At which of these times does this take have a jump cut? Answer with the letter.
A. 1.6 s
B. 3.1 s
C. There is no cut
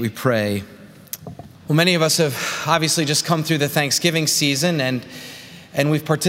A